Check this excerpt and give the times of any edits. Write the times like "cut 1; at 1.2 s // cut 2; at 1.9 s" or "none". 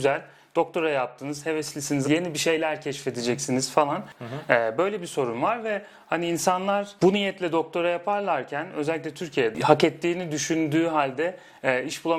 cut 1; at 2.0 s // cut 2; at 4.1 s